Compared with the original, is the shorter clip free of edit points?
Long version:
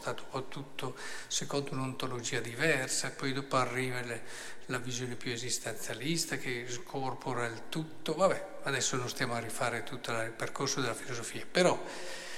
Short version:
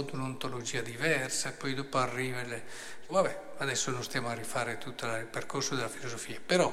no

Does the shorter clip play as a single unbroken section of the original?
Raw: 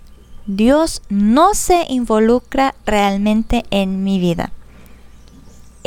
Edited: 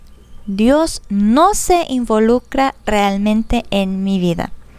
yes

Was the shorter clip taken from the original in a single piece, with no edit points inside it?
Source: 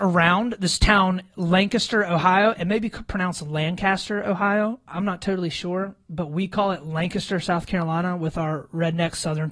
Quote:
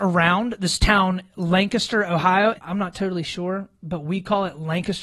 no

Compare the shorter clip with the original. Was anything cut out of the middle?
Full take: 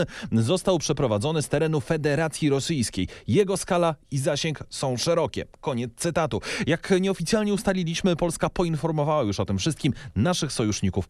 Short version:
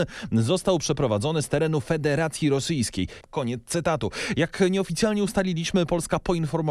yes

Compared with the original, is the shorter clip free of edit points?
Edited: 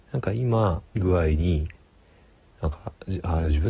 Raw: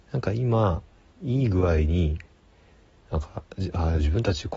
no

